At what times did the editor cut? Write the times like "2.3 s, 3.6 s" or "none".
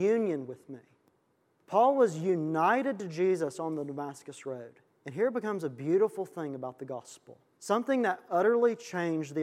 4.9 s

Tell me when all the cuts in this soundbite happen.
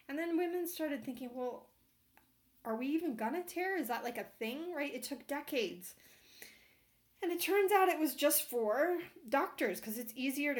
none

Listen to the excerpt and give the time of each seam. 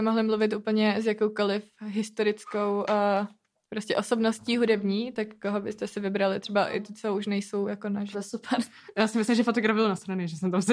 8.1 s

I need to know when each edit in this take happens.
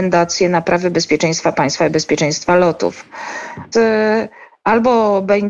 3.7 s

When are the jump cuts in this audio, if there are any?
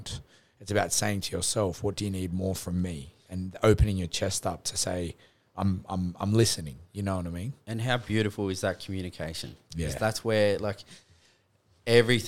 none

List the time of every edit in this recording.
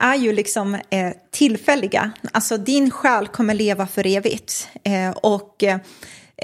none

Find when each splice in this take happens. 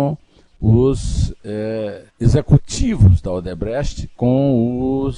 2.1 s

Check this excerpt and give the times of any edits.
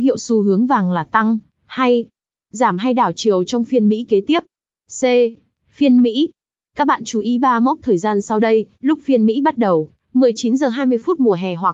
none

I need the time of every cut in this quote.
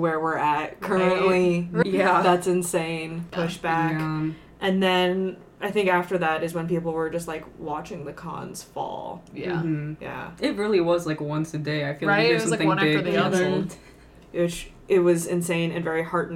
1.8 s, 3.3 s

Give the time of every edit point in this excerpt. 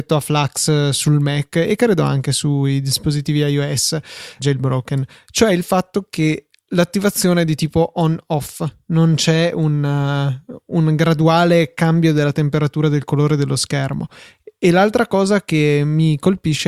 4.4 s

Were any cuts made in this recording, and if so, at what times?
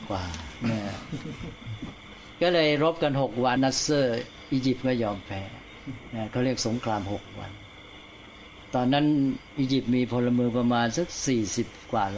3.6 s

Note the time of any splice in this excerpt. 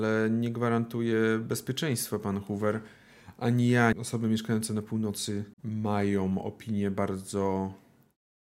3.9 s, 5.5 s

